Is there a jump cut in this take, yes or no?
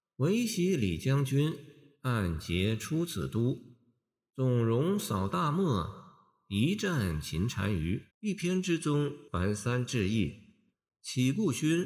yes